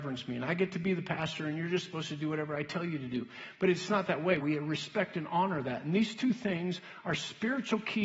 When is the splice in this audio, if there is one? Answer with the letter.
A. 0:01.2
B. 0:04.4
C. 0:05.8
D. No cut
B